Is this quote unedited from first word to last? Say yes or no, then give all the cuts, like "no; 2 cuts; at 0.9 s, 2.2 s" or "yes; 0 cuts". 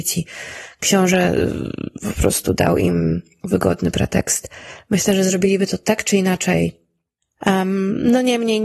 yes; 0 cuts